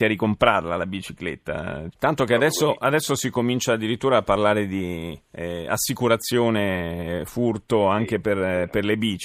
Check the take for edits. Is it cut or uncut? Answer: cut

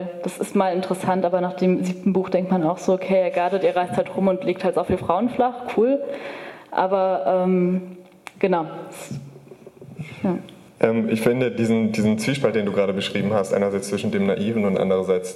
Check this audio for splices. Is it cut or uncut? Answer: uncut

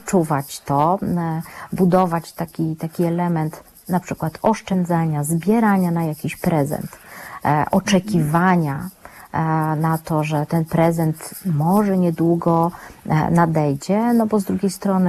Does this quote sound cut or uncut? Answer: uncut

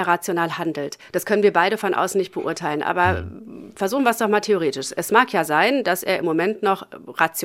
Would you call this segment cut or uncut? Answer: uncut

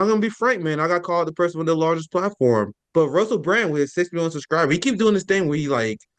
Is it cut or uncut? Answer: cut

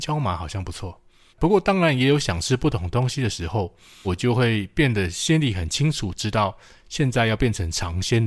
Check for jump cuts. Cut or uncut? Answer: cut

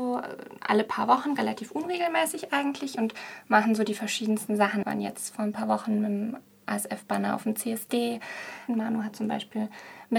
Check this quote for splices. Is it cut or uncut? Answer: cut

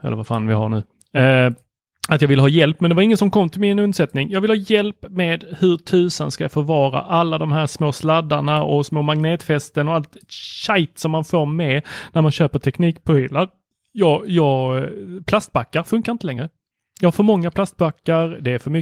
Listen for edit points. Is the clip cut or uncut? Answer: uncut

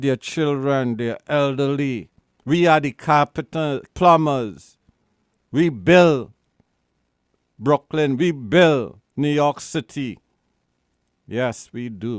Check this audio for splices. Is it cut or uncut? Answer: cut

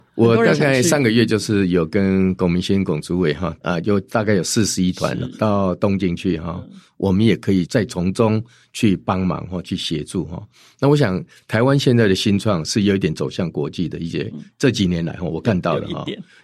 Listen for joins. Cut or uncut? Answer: cut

